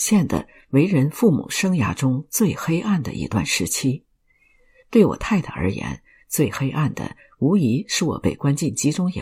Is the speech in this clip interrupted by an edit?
no; 0 cuts

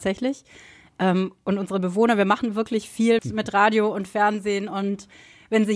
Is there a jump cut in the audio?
yes; 1 cut; at 3.2 s

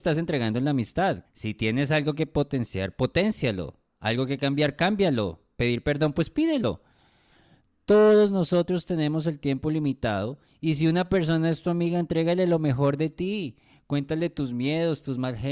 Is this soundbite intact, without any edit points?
no; 1 cut; at 1.3 s

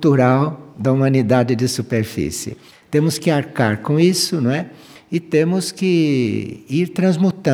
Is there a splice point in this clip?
no; 0 cuts

